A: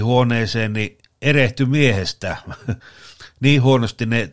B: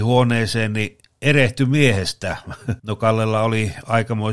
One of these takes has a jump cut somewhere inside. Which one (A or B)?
B